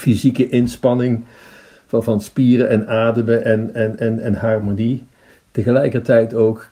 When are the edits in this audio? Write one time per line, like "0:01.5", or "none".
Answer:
none